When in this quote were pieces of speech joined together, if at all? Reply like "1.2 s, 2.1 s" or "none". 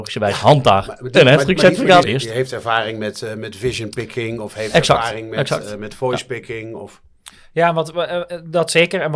2.0 s